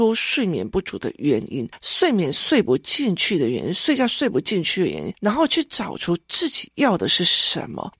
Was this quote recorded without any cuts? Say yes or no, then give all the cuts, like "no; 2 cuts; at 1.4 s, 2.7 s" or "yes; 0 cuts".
yes; 0 cuts